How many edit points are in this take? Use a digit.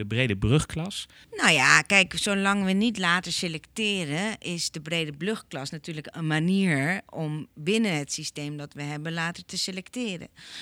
1